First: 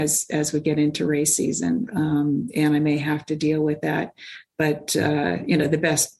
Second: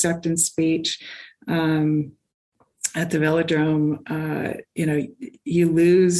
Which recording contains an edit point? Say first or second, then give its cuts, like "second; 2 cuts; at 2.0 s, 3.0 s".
first; 1 cut; at 1.9 s